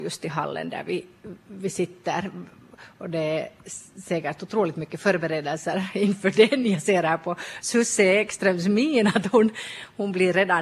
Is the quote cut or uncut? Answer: uncut